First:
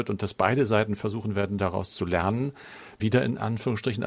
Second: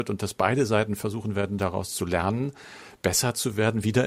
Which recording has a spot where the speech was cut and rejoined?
first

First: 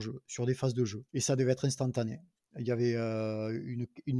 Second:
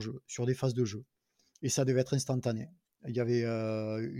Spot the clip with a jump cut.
first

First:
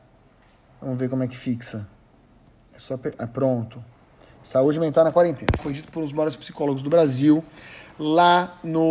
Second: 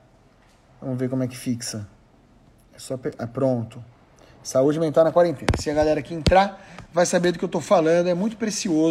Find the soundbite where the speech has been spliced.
first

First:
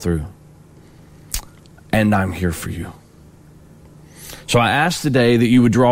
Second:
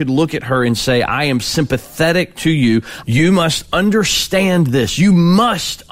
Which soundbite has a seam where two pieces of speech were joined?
second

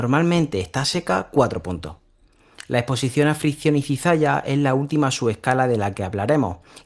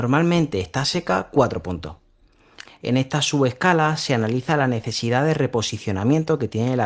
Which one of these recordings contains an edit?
second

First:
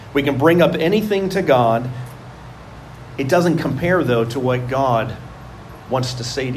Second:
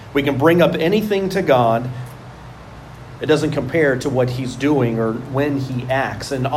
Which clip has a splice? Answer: second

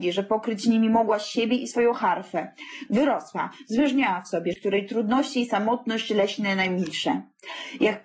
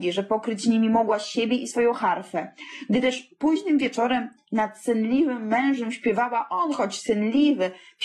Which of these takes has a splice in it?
first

